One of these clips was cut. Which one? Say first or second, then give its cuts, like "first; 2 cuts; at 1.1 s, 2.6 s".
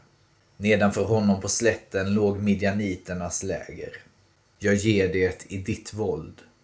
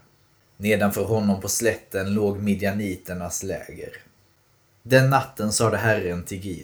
first; 1 cut; at 4.5 s